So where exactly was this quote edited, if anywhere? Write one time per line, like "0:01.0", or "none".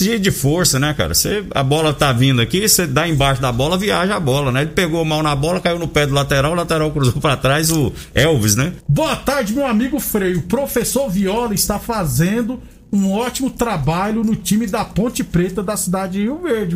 0:08.8